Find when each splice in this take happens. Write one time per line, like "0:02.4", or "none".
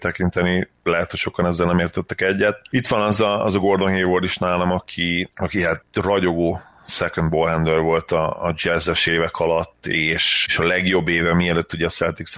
none